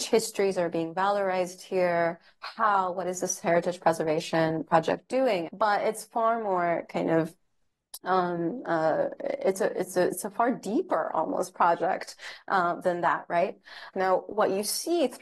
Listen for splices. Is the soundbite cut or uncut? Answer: cut